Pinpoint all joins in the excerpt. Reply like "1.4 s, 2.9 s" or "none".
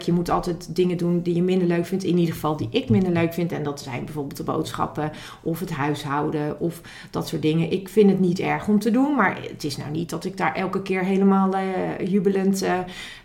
none